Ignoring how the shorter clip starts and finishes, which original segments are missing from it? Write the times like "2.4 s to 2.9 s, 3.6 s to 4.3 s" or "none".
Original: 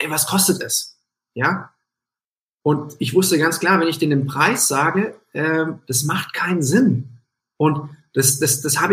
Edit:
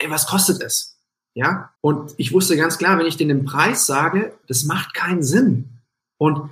1.8 s to 2.6 s, 5.2 s to 5.8 s